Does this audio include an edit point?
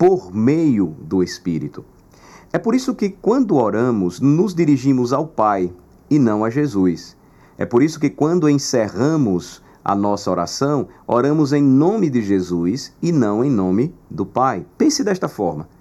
yes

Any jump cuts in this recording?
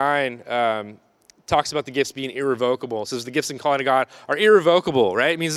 no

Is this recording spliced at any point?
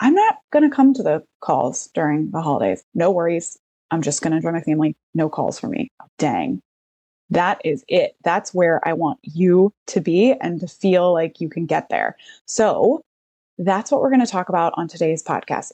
yes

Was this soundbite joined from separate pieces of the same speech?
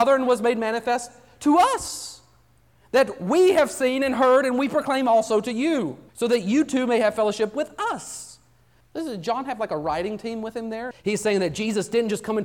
yes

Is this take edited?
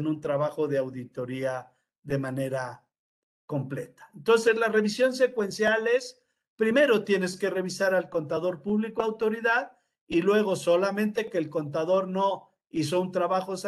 no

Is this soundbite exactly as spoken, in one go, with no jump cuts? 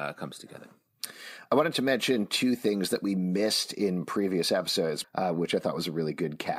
no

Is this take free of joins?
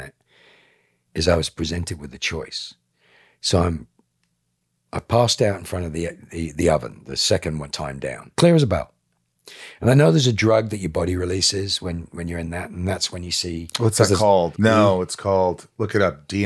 no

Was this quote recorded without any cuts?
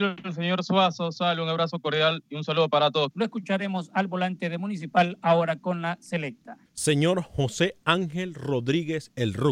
no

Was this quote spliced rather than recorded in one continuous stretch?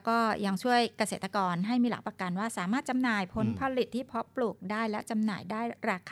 no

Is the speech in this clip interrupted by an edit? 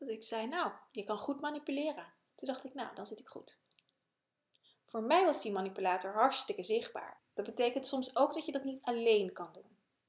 yes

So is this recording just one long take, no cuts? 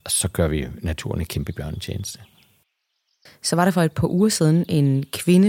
no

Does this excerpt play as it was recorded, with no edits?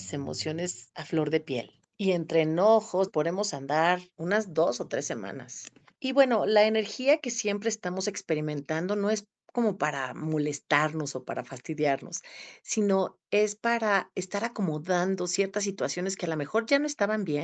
no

